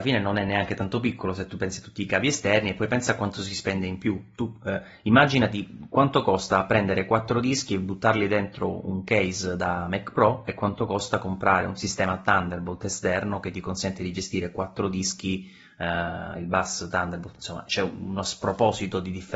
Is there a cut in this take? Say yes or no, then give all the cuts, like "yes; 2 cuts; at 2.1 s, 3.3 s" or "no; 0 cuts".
yes; 2 cuts; at 16.3 s, 17.7 s